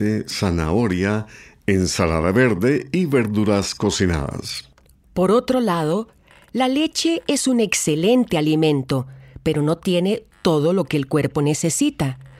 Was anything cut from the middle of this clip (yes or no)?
no